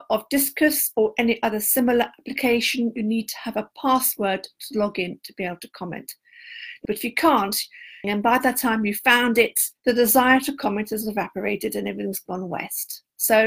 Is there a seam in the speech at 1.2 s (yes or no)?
no